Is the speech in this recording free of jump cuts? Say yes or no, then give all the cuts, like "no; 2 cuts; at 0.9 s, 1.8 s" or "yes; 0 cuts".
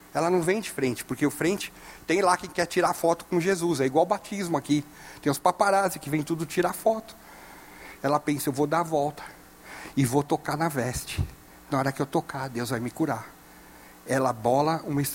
yes; 0 cuts